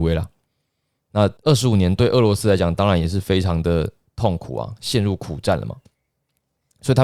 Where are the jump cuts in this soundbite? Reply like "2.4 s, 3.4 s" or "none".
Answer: none